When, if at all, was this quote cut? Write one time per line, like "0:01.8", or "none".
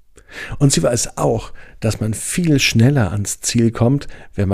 none

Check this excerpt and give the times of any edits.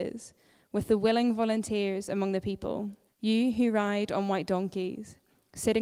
0:03.1

